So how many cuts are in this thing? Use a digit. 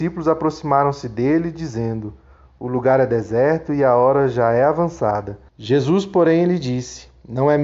1